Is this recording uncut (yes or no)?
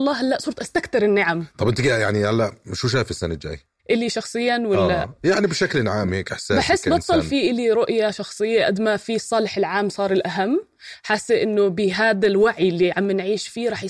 no